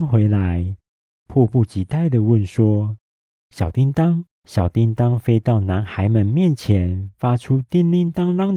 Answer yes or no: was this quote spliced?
yes